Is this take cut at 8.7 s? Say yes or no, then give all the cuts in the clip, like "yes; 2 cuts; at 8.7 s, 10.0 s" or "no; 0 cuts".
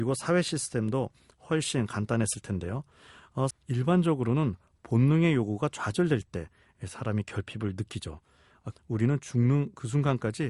yes; 2 cuts; at 3.5 s, 8.7 s